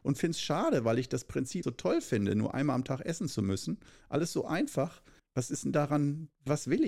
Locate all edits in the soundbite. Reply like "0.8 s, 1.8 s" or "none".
1.6 s, 5.2 s